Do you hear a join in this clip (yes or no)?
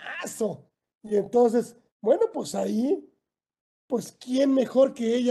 no